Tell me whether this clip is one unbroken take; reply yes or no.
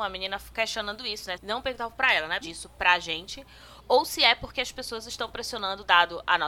no